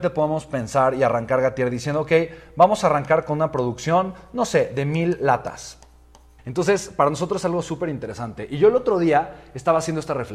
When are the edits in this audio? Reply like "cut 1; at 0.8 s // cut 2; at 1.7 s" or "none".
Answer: cut 1; at 6.4 s